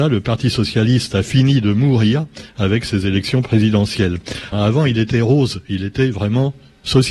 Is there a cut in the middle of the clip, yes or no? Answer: yes